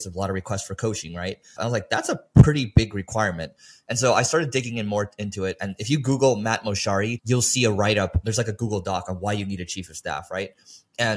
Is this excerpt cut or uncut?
cut